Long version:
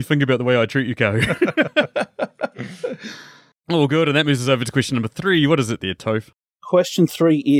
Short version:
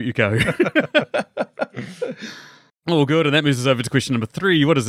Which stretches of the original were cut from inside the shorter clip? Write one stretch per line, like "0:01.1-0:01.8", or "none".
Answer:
none